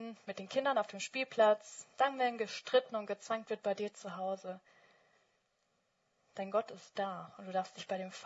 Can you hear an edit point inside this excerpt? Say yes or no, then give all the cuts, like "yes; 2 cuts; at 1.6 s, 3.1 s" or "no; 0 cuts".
no; 0 cuts